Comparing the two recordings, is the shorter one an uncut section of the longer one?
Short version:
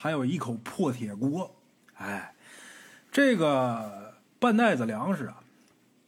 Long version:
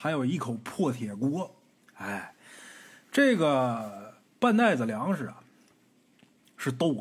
yes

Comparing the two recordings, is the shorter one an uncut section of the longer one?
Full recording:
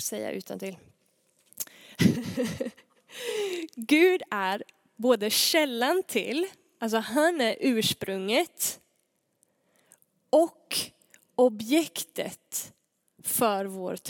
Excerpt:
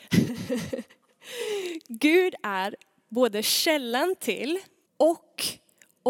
no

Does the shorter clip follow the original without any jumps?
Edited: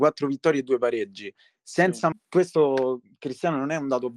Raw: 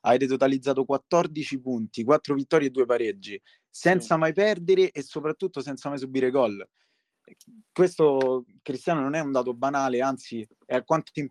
no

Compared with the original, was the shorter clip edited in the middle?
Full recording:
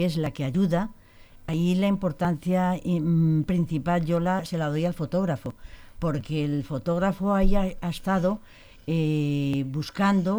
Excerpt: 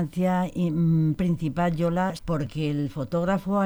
yes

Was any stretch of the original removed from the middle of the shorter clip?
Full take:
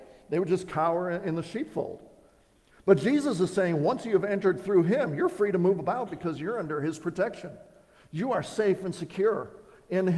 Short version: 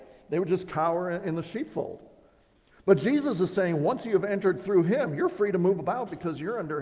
no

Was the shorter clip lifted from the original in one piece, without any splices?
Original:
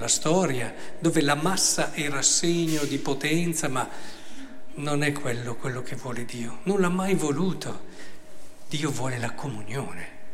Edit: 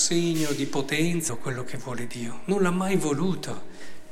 no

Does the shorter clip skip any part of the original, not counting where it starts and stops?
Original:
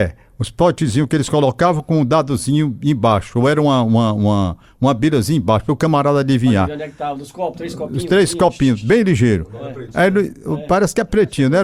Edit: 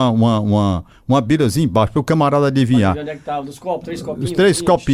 no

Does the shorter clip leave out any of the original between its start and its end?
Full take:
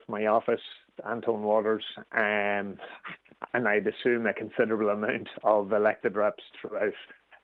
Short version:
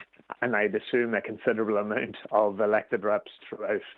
no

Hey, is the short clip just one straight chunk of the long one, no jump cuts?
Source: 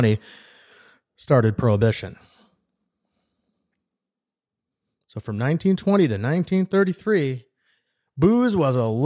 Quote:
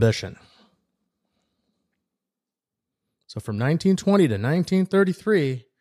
yes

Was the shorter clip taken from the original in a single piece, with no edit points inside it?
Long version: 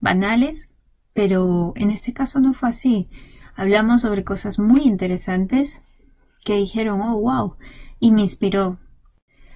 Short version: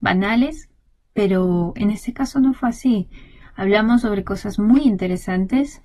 yes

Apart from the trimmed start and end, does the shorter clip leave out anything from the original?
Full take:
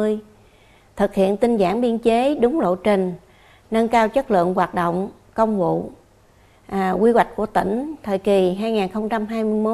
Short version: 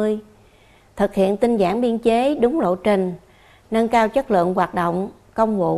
no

